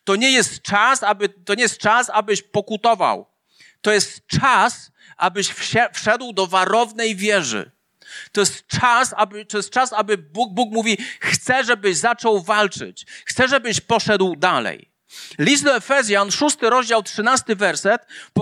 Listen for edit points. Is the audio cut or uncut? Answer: uncut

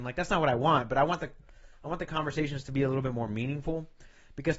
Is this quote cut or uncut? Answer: uncut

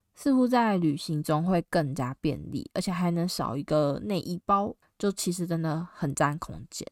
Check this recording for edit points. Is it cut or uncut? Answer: cut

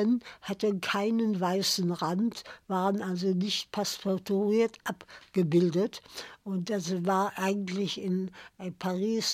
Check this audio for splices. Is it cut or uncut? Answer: uncut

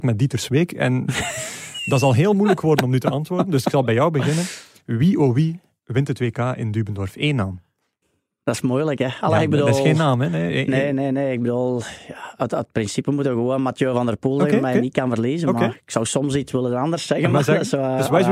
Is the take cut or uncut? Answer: uncut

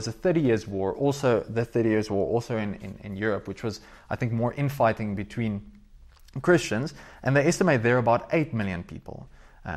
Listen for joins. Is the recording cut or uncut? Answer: uncut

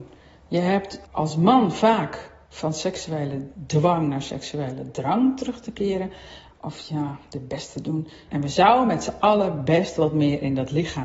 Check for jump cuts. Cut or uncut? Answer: cut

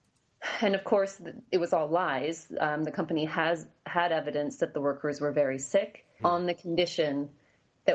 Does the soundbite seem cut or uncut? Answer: cut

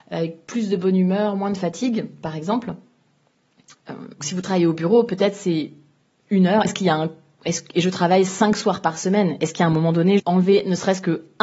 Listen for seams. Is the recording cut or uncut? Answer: cut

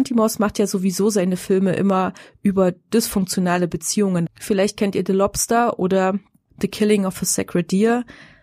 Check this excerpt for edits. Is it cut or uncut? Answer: cut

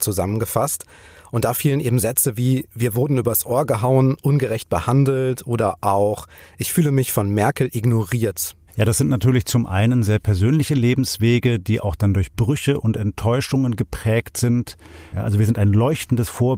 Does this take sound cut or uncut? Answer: cut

